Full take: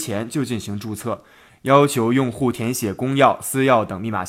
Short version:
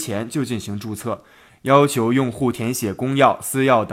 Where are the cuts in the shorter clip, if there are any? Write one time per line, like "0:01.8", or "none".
none

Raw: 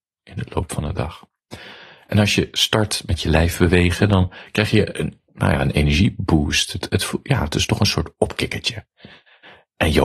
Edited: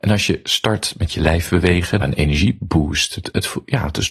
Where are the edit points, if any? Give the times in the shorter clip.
0:02.0

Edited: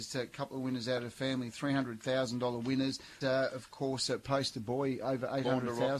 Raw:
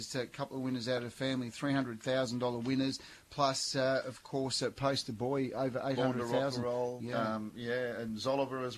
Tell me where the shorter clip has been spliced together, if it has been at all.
0:03.2

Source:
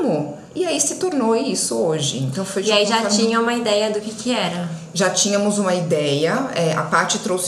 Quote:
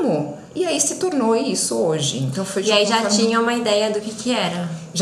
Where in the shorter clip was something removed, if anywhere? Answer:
none

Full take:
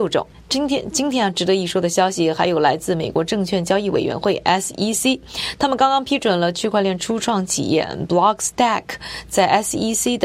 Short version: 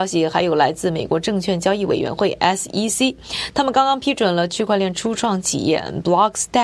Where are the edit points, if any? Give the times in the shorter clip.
none

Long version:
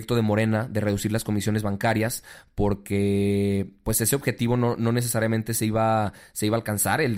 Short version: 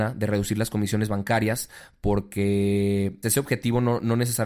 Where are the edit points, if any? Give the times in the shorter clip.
0:03.2

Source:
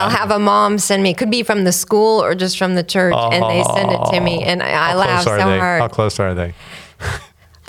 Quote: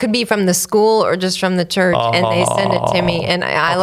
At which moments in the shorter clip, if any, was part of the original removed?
none

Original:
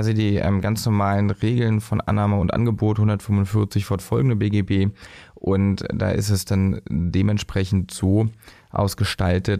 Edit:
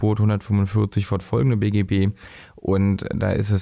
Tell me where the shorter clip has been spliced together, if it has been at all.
none

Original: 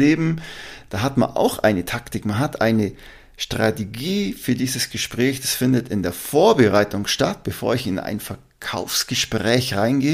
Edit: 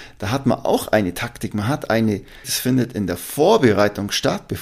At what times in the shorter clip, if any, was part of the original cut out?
0:02.4

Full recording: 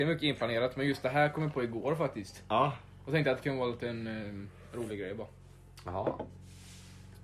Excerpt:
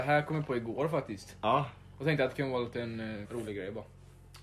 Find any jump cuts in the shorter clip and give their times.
0:03.2

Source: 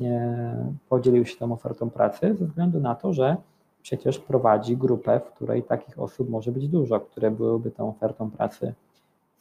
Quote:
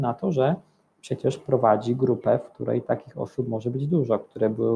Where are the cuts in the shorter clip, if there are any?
none

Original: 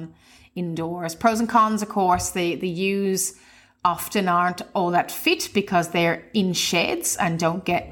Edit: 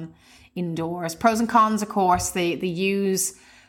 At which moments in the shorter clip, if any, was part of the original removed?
none

